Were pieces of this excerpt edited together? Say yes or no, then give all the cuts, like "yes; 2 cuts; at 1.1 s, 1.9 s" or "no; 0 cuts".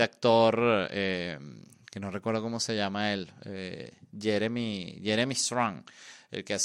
no; 0 cuts